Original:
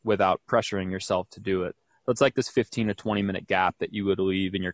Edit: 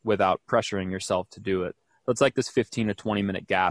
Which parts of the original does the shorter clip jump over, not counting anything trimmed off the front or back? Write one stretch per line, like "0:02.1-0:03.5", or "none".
none